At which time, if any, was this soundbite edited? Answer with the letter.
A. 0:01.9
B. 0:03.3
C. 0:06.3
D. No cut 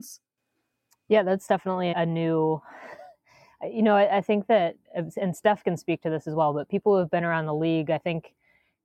A